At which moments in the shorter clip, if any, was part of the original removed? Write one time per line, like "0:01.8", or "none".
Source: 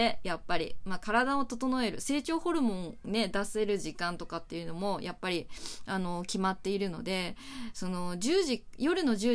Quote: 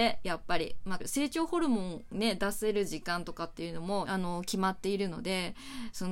0:01.0
0:04.0